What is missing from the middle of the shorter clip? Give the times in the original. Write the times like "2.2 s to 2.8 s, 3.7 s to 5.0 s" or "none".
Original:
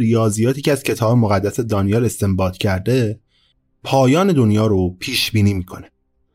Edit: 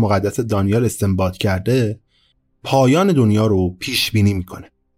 none